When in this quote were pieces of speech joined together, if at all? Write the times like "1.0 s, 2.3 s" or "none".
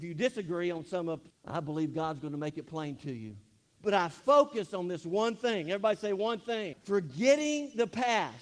1.3 s, 3.8 s, 6.7 s